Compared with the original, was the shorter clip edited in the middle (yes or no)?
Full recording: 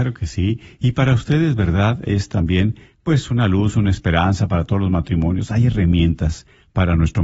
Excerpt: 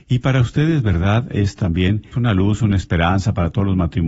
yes